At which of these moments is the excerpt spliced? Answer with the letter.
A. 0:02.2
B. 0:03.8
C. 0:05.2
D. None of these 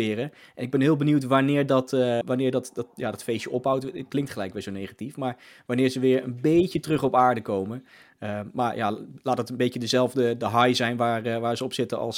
A